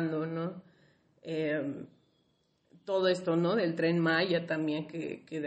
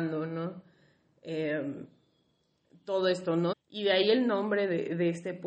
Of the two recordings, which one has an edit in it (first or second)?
second